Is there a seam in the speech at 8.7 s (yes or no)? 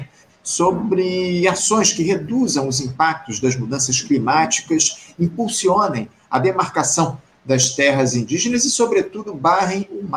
no